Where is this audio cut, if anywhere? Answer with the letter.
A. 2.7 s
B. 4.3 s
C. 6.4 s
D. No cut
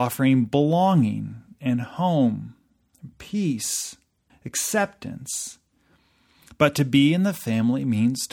B